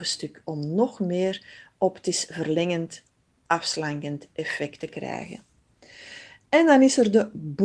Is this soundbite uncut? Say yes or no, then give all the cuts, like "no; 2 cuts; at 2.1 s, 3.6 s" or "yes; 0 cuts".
yes; 0 cuts